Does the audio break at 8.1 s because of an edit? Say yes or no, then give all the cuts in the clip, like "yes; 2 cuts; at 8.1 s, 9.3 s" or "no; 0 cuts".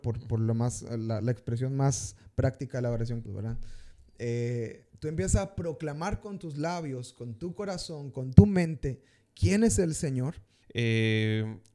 no; 2 cuts; at 3.3 s, 10.6 s